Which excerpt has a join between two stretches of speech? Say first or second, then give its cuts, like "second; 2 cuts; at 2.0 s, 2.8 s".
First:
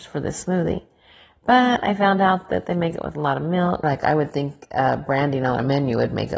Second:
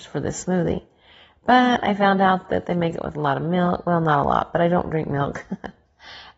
first; 1 cut; at 3.8 s